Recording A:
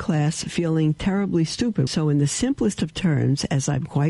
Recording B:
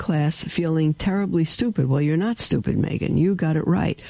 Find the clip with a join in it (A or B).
A